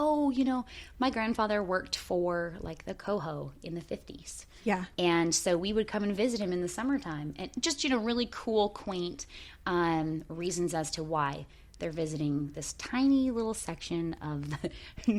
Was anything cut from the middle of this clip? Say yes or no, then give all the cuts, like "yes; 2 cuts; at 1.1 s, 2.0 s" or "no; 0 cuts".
no; 0 cuts